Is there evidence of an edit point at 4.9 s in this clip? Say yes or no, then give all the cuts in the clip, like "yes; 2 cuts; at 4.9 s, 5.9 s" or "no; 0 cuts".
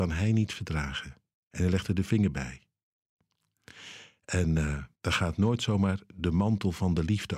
yes; 1 cut; at 4.9 s